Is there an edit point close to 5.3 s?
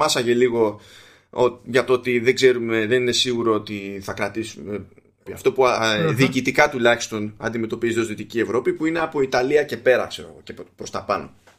yes; 1 cut; at 5.3 s

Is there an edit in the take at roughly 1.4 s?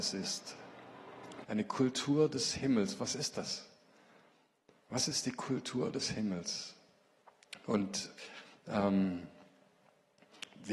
yes; 1 cut; at 1.4 s

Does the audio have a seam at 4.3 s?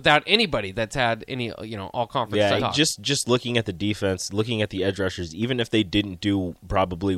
no; 1 cut; at 2.6 s

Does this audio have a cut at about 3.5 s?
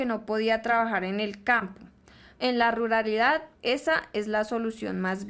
yes; 2 cuts; at 2.3 s, 3.5 s

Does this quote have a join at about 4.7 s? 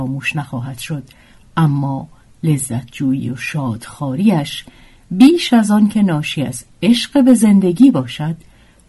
no; 0 cuts

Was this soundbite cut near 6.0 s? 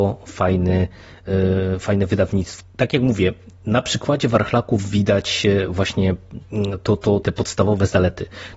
no; 2 cuts; at 2.6 s, 7.2 s

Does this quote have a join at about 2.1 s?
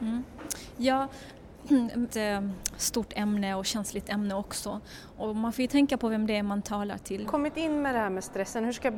yes; 2 cuts; at 2.1 s, 7.2 s

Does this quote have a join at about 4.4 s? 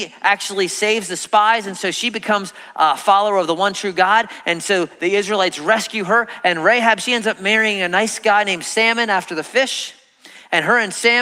no; 0 cuts

